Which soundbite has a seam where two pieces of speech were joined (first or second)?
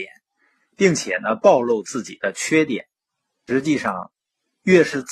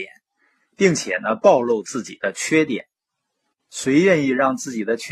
first